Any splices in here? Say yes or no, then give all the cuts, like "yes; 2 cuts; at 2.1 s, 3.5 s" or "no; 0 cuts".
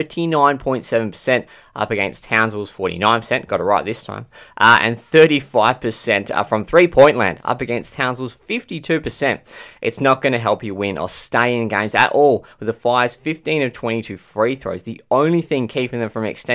no; 0 cuts